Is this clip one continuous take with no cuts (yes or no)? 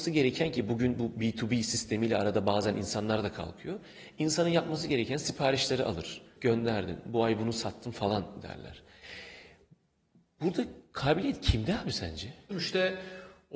no